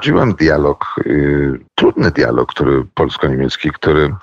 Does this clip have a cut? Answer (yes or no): yes